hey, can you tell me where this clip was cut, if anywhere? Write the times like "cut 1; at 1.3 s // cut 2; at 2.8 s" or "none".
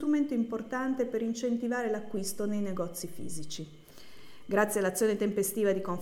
none

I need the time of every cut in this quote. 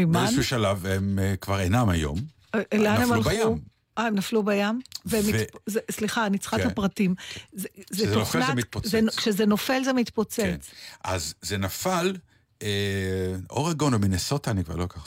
none

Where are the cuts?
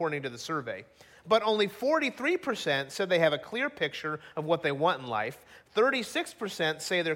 none

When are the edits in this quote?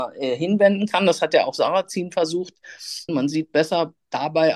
cut 1; at 3.1 s

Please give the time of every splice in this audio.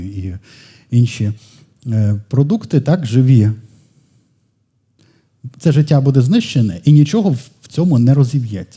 none

